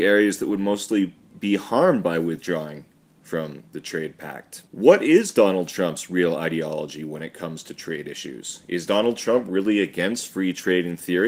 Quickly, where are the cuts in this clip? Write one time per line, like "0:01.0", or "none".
0:04.7